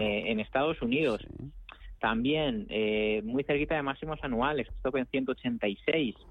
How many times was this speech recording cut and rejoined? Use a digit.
1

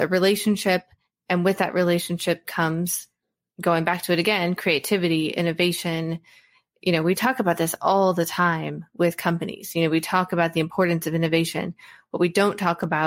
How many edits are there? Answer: 0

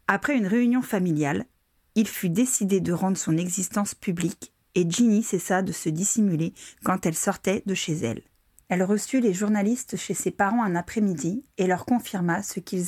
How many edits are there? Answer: 1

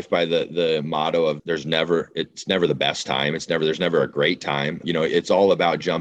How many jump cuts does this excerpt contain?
2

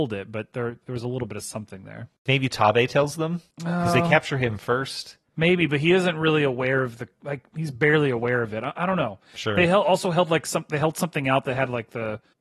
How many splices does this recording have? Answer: 0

